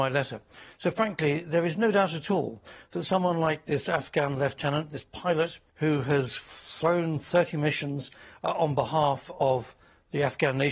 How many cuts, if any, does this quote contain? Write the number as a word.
one